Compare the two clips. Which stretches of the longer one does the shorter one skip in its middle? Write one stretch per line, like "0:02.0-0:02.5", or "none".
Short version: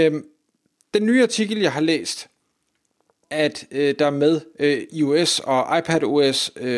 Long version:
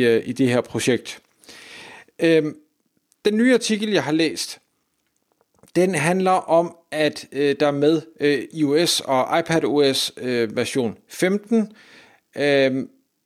0:05.6-0:06.8